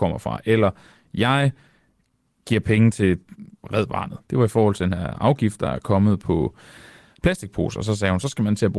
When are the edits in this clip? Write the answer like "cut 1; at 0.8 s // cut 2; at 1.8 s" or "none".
cut 1; at 4.2 s